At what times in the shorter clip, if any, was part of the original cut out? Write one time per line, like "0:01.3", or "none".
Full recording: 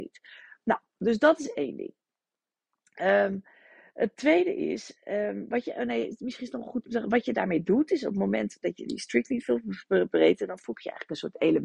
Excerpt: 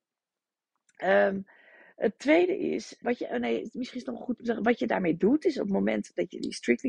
0:03.0